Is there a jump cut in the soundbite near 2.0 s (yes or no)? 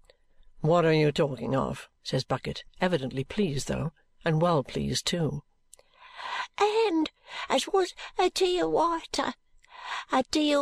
yes